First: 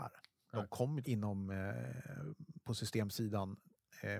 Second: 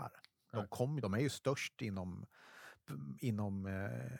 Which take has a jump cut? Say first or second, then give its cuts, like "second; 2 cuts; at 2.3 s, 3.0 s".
first; 1 cut; at 1.0 s